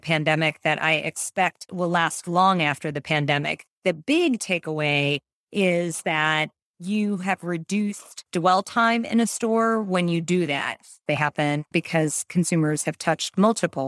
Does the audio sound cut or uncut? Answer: cut